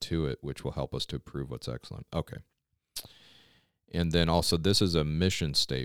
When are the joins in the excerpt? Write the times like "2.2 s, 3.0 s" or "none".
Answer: none